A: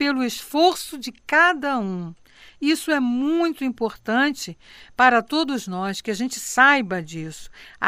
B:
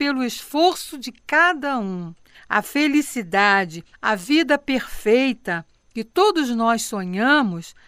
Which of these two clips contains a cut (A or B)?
B